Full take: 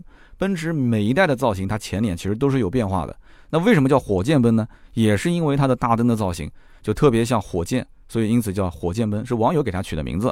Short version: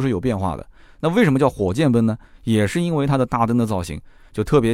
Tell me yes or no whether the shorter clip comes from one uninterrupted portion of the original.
yes